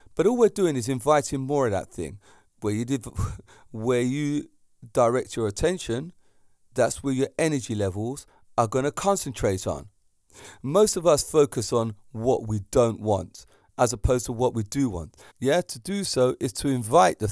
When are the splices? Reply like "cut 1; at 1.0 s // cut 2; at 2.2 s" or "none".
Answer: cut 1; at 15.3 s